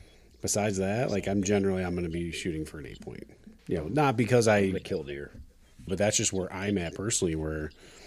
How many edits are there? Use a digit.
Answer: 2